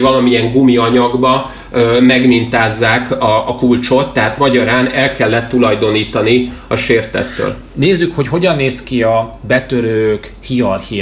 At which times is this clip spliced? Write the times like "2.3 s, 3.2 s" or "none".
none

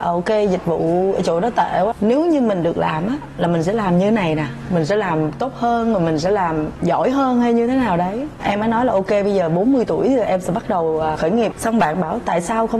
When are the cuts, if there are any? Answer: none

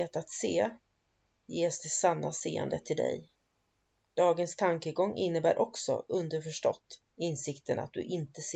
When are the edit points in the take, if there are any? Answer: 4.0 s, 7.1 s

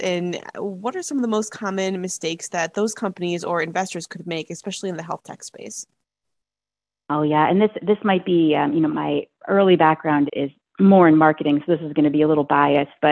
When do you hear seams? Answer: 8.9 s, 10.3 s

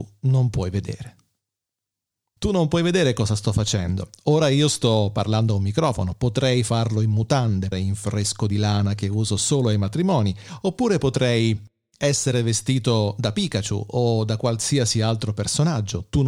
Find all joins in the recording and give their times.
2.4 s, 7.7 s

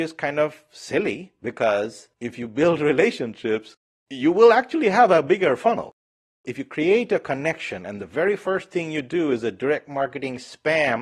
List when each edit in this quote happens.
none

